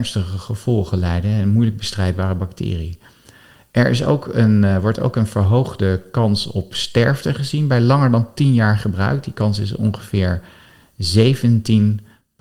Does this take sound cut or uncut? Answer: uncut